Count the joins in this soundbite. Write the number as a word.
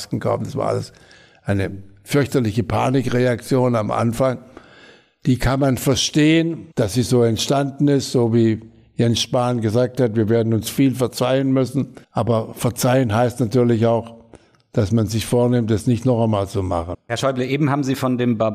three